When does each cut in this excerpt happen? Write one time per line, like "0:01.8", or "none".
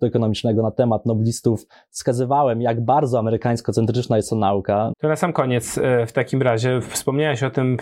0:04.9